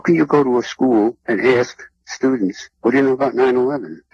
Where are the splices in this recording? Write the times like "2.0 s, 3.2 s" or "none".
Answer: none